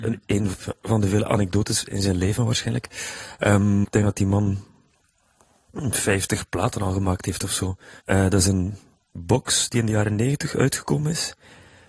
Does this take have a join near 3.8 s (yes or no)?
yes